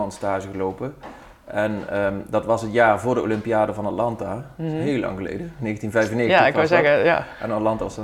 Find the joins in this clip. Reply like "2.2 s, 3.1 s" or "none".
none